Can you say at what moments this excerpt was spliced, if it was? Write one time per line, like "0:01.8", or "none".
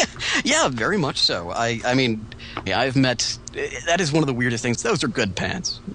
0:02.7
0:04.8

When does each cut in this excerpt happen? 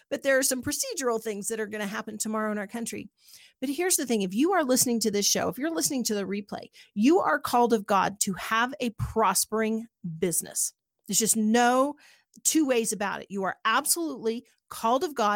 none

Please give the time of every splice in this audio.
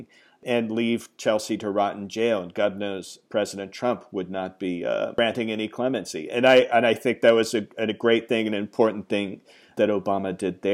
none

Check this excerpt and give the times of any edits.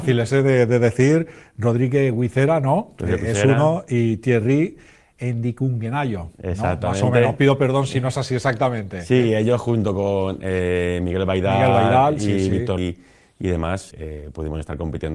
0:12.8
0:13.9

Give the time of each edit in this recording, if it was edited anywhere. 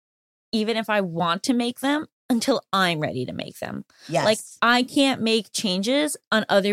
none

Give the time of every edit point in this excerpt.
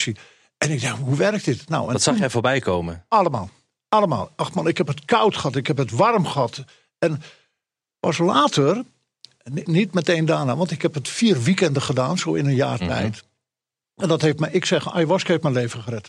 0:09.7

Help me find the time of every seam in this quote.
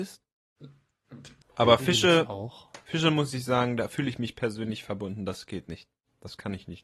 0:01.4

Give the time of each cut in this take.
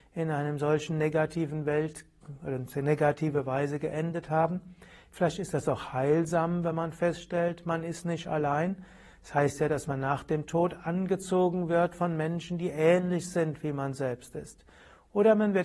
none

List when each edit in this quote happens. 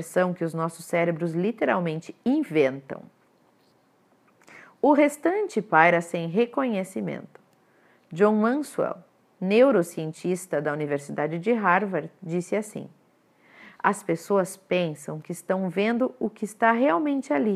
none

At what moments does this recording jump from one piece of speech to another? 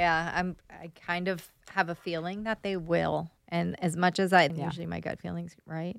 0:03.4
0:04.5

